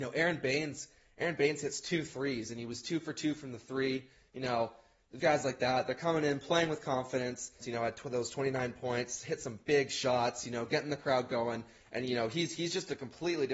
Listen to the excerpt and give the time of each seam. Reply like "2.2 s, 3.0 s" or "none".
5.2 s, 7.6 s